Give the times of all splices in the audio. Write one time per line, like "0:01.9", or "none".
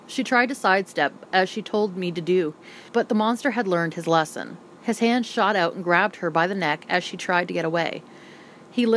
0:02.9